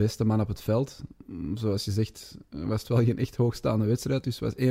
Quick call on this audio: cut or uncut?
uncut